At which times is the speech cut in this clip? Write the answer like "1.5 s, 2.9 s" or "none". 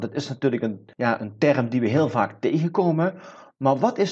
0.9 s